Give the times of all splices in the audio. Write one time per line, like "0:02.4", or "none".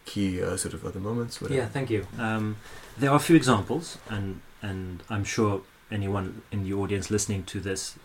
0:02.1
0:04.0
0:06.5